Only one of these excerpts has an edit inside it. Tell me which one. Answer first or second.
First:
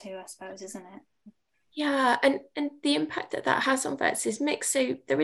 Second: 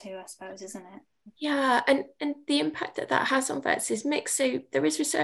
second